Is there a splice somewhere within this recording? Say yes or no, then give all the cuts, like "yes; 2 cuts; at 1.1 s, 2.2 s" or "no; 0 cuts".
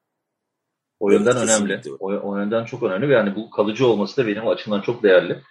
no; 0 cuts